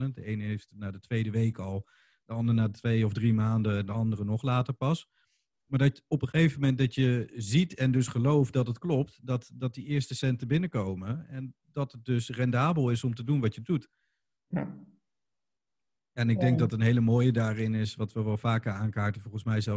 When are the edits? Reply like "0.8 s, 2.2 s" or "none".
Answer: none